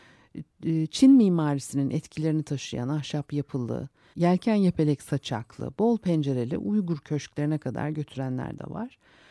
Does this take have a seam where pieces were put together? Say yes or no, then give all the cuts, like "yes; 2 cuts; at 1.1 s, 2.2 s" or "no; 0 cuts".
yes; 1 cut; at 4.1 s